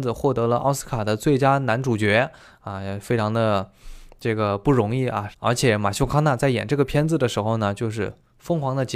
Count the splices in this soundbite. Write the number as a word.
one